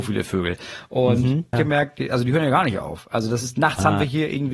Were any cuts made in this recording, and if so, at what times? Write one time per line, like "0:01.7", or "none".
0:01.5